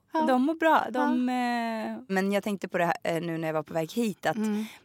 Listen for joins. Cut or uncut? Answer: cut